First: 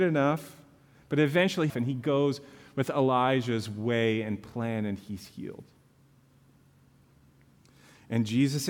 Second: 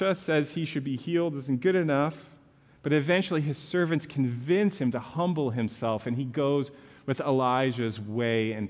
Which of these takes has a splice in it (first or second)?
first